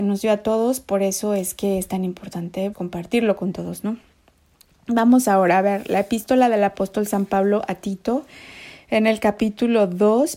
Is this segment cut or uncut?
cut